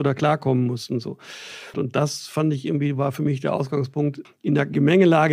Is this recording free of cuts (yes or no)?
no